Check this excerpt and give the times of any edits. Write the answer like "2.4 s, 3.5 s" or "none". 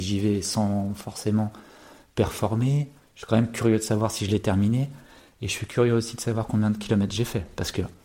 none